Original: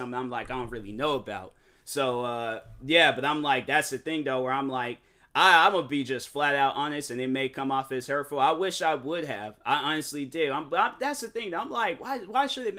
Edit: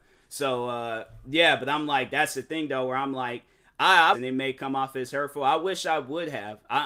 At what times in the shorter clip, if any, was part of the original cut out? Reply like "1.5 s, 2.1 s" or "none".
4.1 s